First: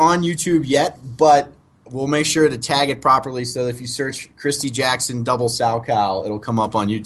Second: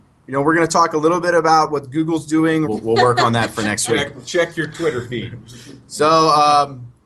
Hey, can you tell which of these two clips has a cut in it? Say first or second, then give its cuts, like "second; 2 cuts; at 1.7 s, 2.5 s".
second; 1 cut; at 2.6 s